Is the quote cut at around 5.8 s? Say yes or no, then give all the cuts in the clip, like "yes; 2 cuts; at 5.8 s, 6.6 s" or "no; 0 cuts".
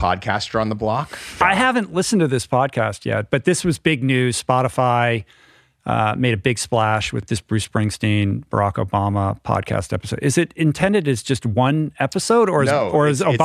no; 1 cut; at 1.4 s